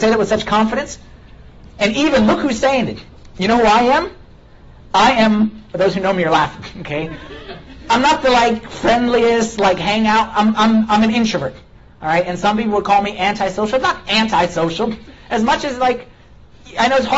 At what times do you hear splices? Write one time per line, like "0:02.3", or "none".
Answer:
0:05.7